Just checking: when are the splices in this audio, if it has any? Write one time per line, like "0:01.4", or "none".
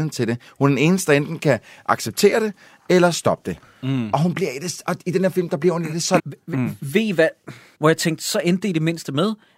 0:06.2
0:07.7

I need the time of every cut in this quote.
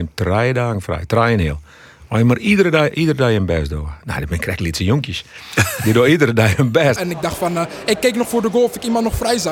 0:07.0
0:08.2

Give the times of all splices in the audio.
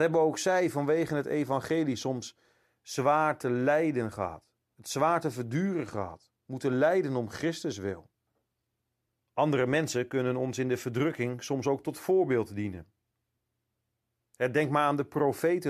0:09.2

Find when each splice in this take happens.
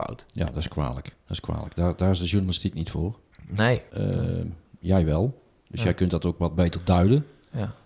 0:03.9

